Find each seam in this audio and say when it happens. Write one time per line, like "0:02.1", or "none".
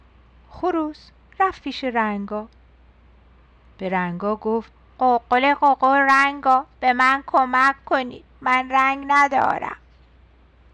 none